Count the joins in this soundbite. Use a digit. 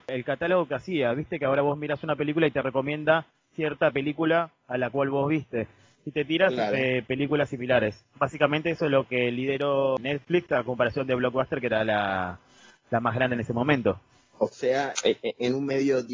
1